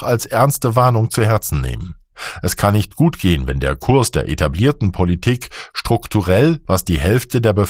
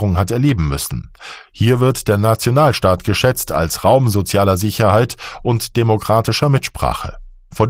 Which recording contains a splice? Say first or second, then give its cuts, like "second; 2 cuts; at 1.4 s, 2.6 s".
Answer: first; 1 cut; at 6.7 s